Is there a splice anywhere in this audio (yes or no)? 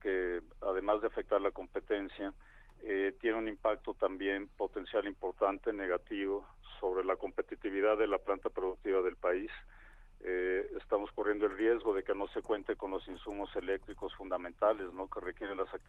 no